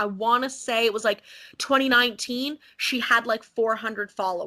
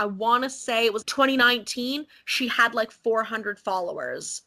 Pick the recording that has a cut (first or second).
second